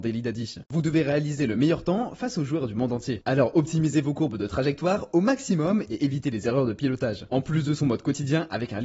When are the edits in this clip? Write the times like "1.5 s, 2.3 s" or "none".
none

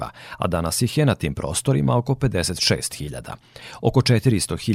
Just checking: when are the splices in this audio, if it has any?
none

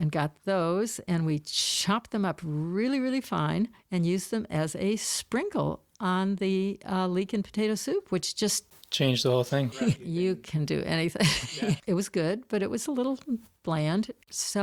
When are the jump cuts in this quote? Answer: 9.7 s, 11.8 s

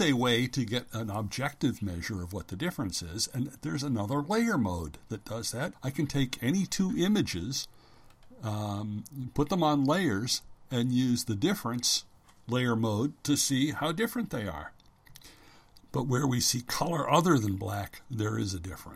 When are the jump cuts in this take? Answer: 5.7 s, 15.8 s

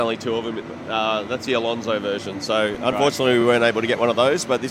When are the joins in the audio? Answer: none

